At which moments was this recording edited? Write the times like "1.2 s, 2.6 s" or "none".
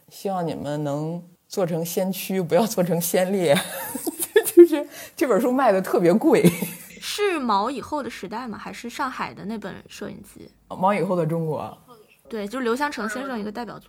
none